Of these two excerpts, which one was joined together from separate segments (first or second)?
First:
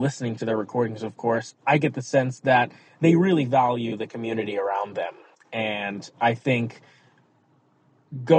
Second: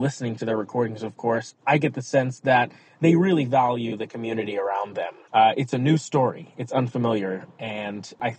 second